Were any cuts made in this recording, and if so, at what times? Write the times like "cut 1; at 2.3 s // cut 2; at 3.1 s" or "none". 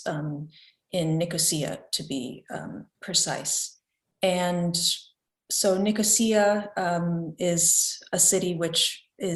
cut 1; at 2.9 s